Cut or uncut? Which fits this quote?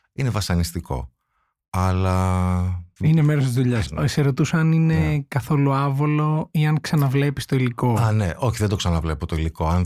cut